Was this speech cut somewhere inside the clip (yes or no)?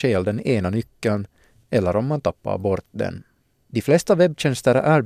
no